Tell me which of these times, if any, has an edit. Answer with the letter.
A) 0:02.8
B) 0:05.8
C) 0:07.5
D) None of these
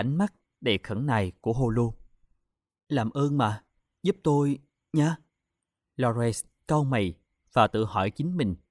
B